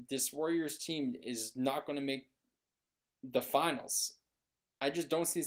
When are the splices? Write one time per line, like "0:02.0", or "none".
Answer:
none